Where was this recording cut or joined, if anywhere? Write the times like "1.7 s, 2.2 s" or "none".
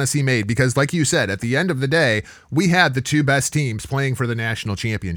none